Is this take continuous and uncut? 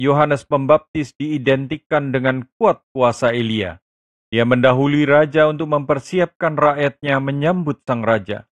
no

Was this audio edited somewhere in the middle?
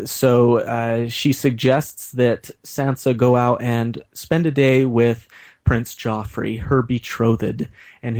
no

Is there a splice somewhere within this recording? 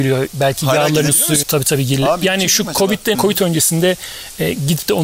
yes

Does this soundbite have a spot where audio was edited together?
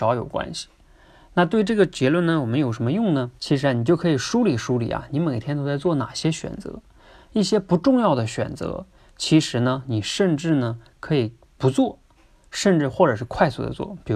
yes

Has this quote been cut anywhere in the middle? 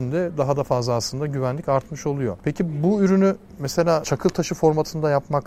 no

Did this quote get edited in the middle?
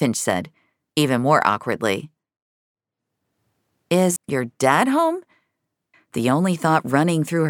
yes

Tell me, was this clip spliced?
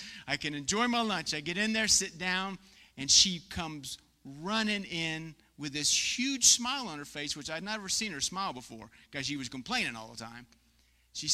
no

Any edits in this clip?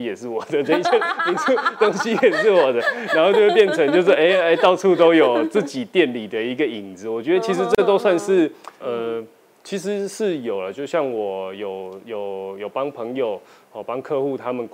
yes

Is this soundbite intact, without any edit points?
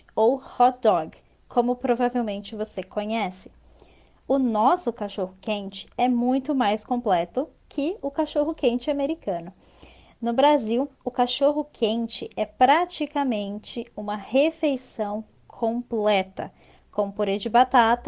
yes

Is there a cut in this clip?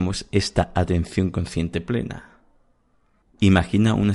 yes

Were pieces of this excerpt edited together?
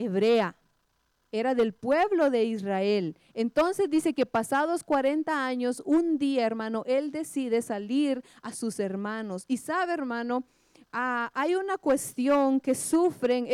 no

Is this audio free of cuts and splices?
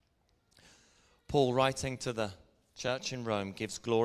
yes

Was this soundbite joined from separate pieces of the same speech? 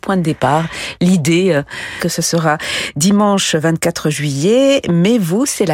yes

